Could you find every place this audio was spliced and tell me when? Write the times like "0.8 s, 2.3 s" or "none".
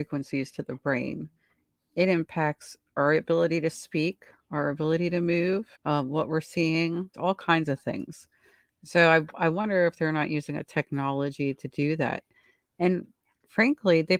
5.8 s, 7.1 s